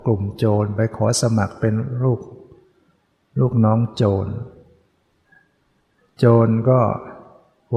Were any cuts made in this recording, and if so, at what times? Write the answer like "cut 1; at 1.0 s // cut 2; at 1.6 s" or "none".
none

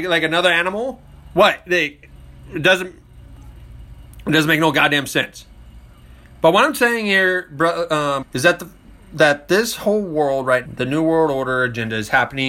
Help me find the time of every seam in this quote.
cut 1; at 8.2 s // cut 2; at 10.7 s

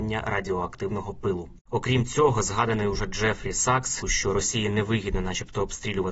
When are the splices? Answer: cut 1; at 1.6 s // cut 2; at 4.0 s

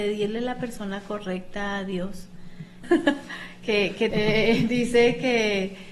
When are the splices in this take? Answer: cut 1; at 2.8 s // cut 2; at 4.1 s

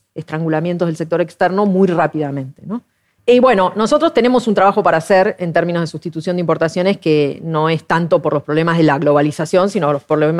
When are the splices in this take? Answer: cut 1; at 3.2 s

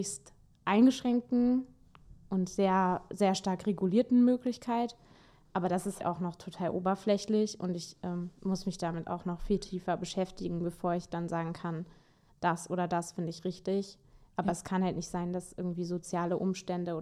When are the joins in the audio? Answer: cut 1; at 6.0 s

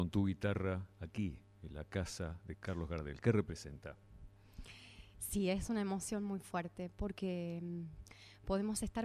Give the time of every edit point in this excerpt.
none

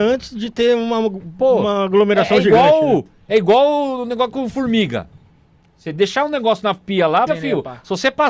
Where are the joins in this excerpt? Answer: cut 1; at 7.3 s

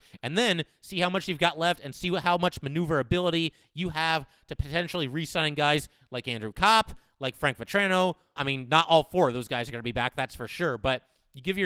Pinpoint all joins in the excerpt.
cut 1; at 8.4 s

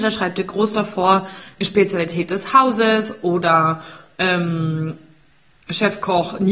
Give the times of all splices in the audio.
cut 1; at 1.6 s

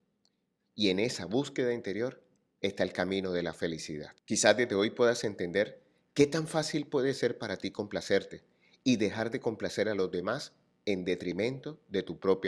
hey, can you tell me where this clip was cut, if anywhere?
cut 1; at 4.2 s

